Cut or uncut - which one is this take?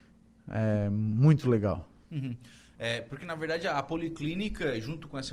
uncut